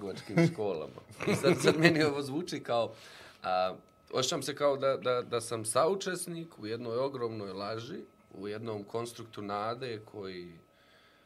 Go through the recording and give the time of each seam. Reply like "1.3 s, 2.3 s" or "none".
none